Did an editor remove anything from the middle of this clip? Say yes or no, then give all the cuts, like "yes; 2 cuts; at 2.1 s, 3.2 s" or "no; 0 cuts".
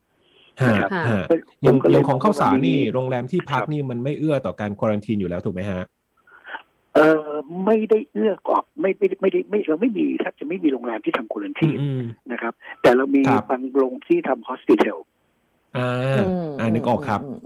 no; 0 cuts